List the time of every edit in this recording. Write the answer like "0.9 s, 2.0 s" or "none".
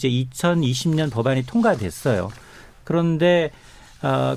none